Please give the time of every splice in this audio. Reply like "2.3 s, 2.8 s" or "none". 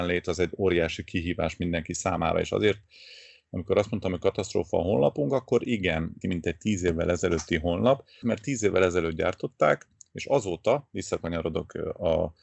6.2 s, 8.2 s